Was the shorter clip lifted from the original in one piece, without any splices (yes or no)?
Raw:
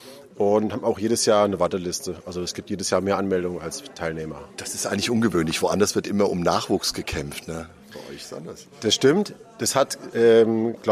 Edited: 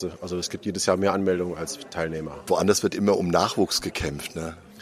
no